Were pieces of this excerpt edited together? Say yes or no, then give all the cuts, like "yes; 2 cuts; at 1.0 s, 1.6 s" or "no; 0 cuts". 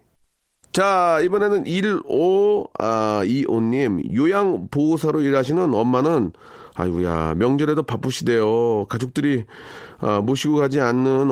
no; 0 cuts